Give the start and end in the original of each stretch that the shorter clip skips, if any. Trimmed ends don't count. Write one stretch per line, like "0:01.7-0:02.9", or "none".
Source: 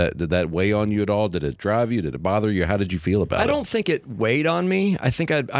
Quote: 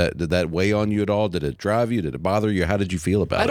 none